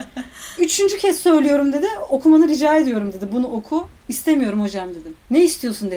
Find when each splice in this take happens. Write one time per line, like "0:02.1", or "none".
none